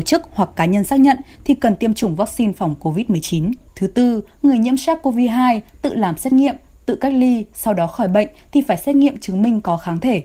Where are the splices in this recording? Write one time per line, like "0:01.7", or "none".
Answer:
0:03.7

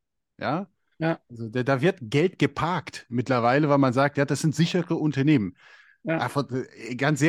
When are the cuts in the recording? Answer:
none

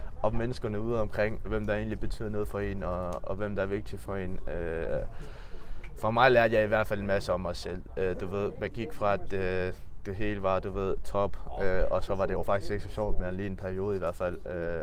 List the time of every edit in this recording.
0:01.4

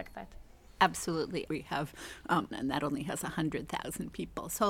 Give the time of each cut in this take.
0:01.5
0:02.5

